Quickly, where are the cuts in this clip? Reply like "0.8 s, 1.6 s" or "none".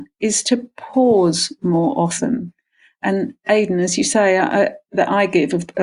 4.9 s